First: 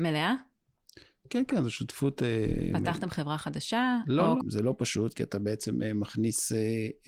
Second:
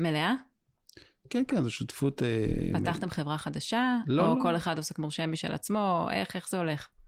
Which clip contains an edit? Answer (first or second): first